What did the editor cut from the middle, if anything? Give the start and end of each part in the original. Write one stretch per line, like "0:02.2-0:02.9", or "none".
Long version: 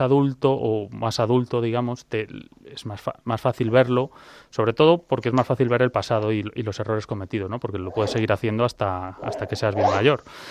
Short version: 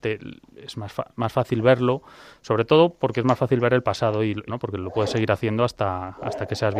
0:06.6-0:07.5